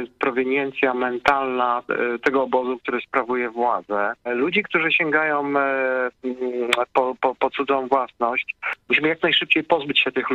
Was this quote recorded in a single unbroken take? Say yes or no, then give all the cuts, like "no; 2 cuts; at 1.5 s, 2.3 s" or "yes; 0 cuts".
no; 2 cuts; at 4.3 s, 7.2 s